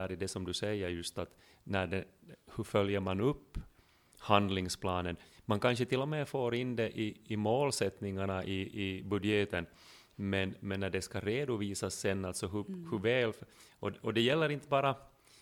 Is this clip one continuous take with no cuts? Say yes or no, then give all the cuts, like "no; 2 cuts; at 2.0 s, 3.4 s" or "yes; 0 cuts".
yes; 0 cuts